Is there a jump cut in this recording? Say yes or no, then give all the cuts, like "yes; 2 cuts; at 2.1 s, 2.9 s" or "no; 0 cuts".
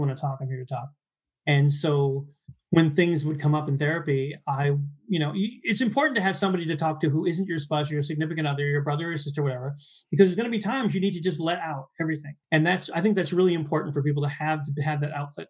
yes; 1 cut; at 12.4 s